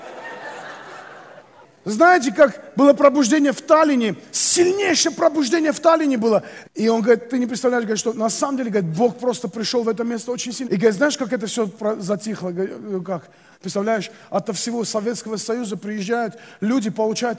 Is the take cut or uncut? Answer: cut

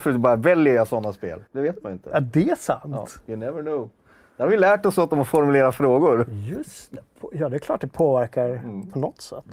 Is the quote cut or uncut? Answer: cut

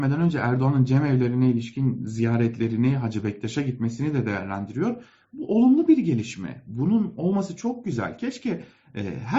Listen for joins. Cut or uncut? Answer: uncut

